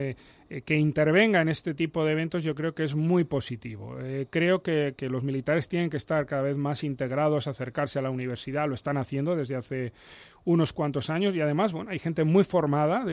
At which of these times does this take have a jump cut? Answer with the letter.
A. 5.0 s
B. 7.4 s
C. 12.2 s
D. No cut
D